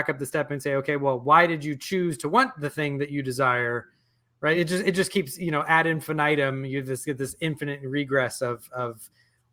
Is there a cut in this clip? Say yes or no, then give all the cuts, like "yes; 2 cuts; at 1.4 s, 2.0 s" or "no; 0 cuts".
no; 0 cuts